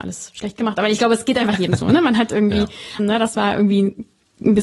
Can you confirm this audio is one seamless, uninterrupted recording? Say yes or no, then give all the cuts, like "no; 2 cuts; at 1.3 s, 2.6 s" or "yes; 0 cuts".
no; 1 cut; at 3.0 s